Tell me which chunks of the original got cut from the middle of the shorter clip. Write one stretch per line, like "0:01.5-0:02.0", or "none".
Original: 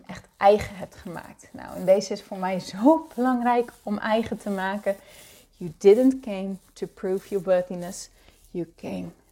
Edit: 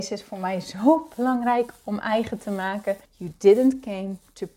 0:05.0-0:05.5